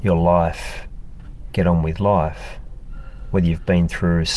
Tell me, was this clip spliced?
no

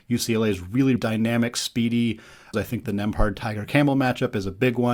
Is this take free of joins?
no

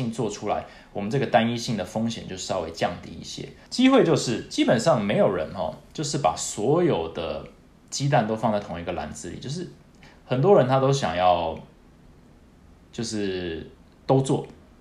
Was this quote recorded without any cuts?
no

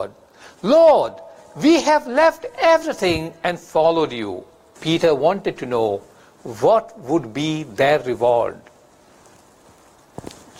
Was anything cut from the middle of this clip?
yes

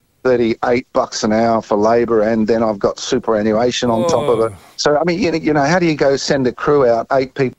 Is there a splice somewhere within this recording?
no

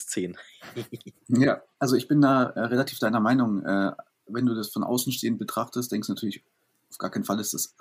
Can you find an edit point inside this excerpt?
no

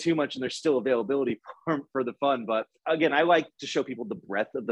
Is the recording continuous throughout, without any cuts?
no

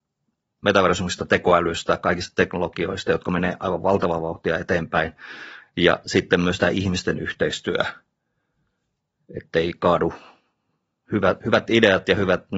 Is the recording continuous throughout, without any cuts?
yes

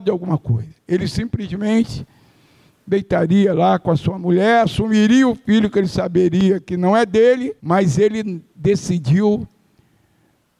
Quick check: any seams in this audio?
yes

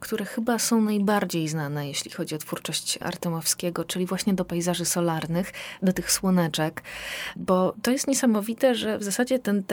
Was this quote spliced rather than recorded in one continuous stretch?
no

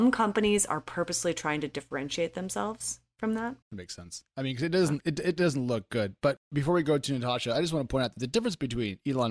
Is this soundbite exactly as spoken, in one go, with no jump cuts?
no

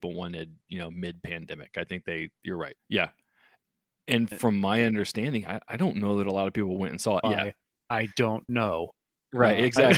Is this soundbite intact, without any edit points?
no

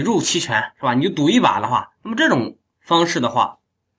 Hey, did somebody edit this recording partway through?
no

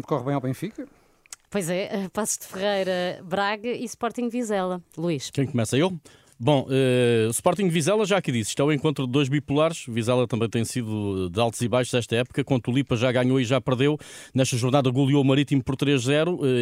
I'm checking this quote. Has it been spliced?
no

